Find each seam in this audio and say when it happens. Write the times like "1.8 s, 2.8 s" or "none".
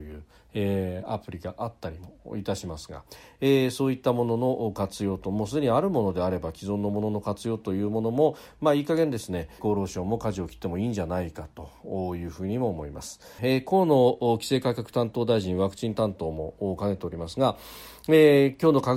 9.6 s, 13.4 s

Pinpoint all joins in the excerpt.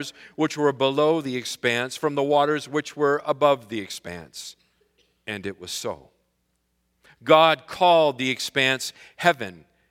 none

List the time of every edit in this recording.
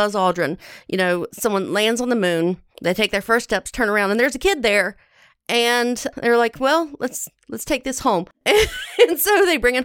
2.7 s, 8.3 s

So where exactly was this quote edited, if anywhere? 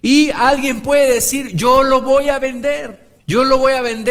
3.2 s

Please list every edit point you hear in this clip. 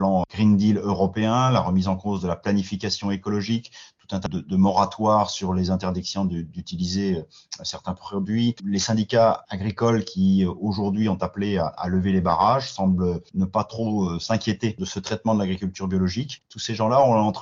4.3 s, 8.6 s

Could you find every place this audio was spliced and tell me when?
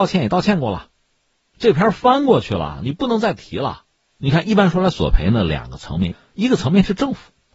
4.1 s

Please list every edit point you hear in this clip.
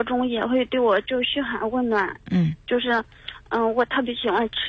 none

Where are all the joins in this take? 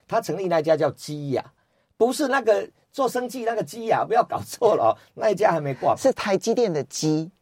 none

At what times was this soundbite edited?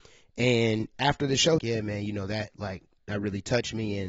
1.6 s

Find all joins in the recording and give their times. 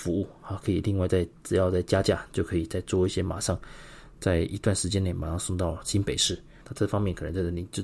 6.6 s

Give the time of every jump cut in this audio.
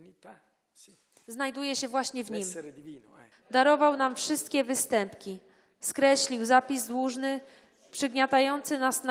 3.3 s

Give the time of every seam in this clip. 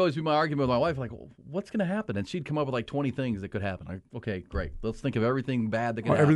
none

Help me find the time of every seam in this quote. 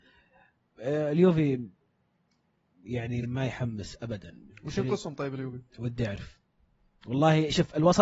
3.2 s, 5.7 s

